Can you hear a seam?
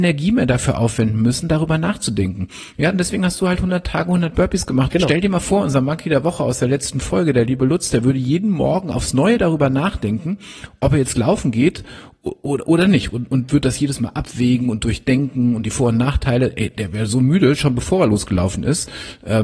yes; 1 cut; at 4.9 s

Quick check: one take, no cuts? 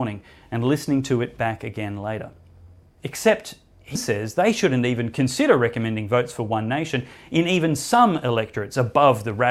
no; 2 cuts; at 2.8 s, 4.0 s

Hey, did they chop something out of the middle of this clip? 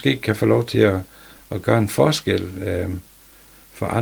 no; 0 cuts

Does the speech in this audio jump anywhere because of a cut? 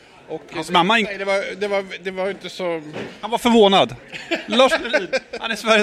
yes; 1 cut; at 1.0 s

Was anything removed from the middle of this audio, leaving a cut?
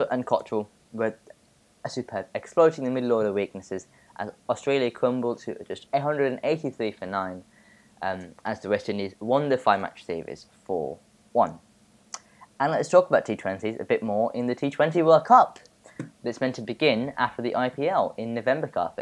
no; 0 cuts

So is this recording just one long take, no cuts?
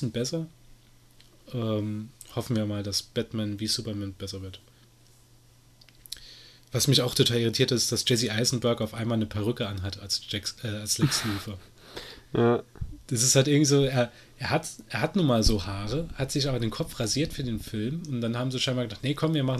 yes; 0 cuts

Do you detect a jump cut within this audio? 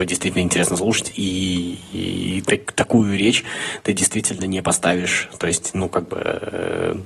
no; 0 cuts

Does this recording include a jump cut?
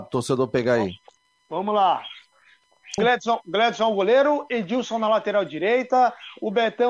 yes; 1 cut; at 3.0 s

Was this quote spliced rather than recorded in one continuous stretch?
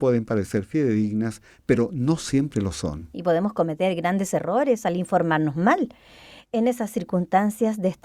no; 0 cuts

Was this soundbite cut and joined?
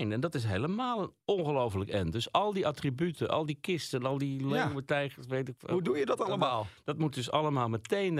no; 0 cuts

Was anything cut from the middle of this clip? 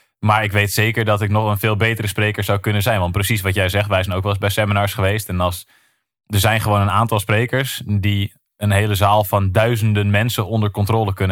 no; 0 cuts

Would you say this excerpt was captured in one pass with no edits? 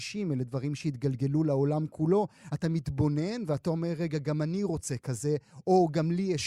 yes; 0 cuts

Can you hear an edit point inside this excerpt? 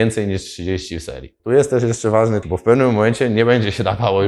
yes; 2 cuts; at 1.4 s, 2.4 s

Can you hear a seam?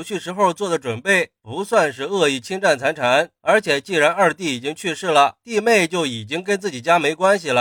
no; 0 cuts

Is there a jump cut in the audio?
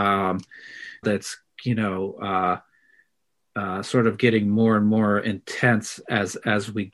yes; 1 cut; at 1.0 s

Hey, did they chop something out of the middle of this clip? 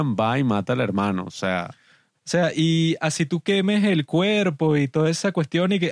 yes; 1 cut; at 2.1 s

